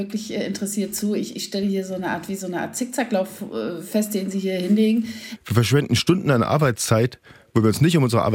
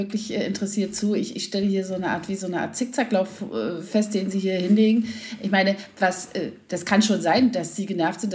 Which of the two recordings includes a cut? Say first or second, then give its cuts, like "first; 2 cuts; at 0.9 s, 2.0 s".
first; 1 cut; at 5.4 s